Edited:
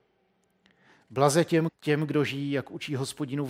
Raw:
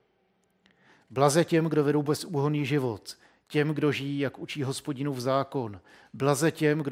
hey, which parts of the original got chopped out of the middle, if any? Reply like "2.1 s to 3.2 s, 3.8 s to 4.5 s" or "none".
1.7 s to 3.3 s